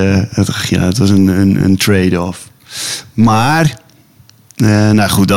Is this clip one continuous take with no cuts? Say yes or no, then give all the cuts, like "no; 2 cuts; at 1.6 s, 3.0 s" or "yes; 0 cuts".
yes; 0 cuts